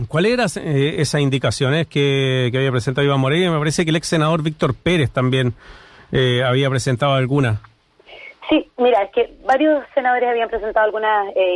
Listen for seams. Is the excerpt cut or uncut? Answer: uncut